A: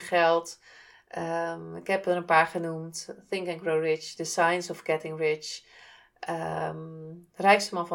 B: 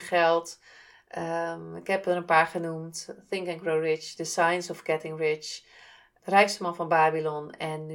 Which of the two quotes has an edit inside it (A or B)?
B